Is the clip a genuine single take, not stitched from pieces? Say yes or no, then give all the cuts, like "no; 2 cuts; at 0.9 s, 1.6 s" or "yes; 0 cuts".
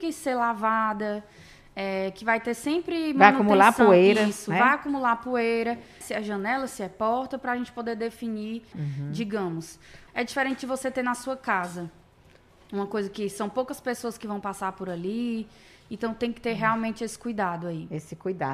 no; 3 cuts; at 6.0 s, 8.7 s, 10.1 s